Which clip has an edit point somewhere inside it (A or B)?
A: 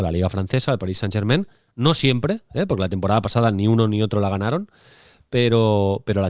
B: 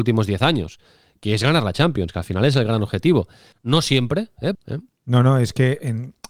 B